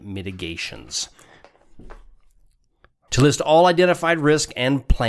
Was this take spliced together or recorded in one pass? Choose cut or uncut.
cut